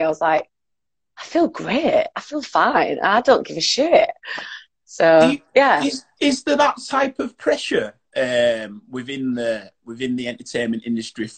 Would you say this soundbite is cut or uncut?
uncut